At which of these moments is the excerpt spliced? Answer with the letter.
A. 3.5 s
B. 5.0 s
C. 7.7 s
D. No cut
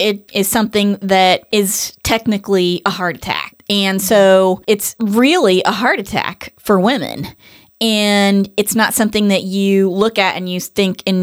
A